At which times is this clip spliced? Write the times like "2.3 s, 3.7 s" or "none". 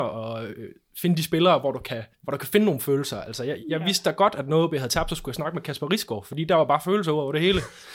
2.1 s